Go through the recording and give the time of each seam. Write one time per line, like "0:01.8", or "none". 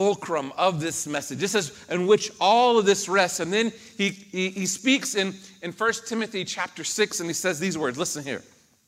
none